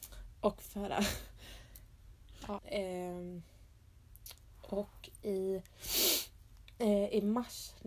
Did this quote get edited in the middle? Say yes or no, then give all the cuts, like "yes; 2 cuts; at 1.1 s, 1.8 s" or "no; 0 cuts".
yes; 1 cut; at 2.6 s